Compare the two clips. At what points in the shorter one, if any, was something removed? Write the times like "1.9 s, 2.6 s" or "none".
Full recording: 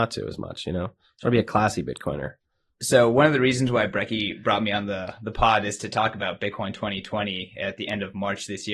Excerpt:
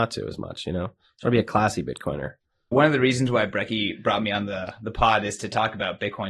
2.7 s